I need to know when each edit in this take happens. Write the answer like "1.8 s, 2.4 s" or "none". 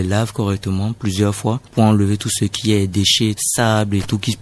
3.4 s